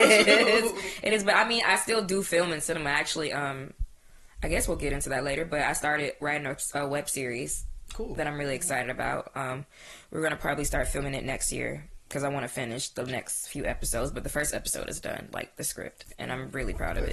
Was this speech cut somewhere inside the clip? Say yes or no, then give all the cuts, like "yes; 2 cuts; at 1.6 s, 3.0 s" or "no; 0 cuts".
no; 0 cuts